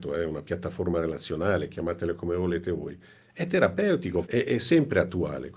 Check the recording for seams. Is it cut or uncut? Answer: cut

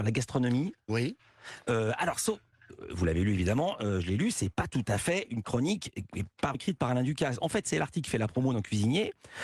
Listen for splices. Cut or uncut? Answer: cut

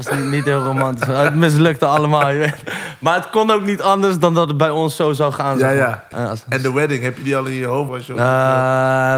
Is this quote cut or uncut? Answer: cut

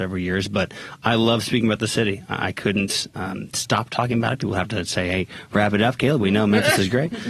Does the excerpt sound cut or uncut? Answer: uncut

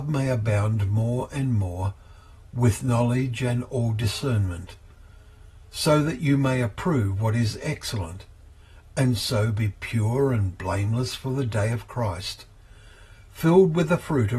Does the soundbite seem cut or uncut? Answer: uncut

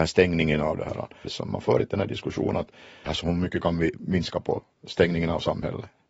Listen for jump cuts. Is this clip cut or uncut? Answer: cut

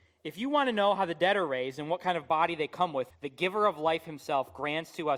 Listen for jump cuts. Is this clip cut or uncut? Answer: cut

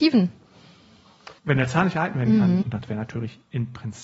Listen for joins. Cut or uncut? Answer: cut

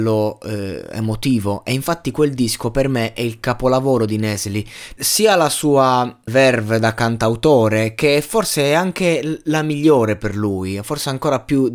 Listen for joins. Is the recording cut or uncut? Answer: cut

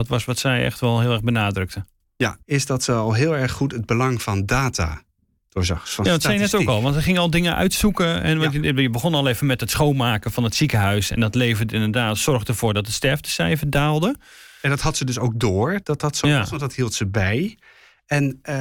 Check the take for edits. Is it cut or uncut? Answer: cut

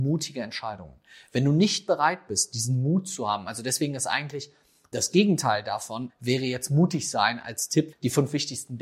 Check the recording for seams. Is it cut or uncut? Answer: cut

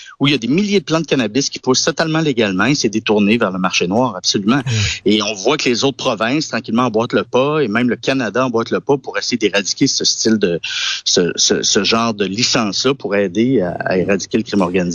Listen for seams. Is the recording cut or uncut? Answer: uncut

